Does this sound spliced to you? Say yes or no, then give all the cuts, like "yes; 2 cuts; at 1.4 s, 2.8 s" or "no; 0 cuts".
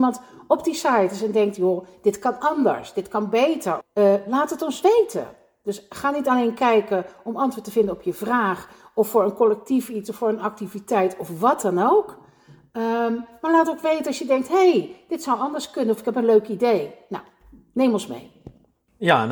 yes; 1 cut; at 3.8 s